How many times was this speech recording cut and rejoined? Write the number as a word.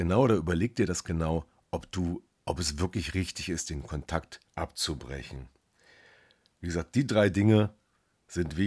one